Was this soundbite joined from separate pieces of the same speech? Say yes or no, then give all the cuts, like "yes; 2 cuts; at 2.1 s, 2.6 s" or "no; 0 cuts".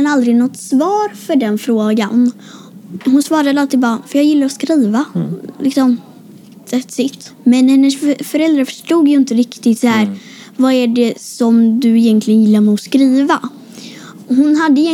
yes; 1 cut; at 7.3 s